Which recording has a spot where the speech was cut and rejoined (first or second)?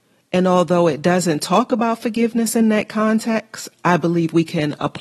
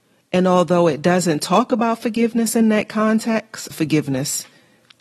second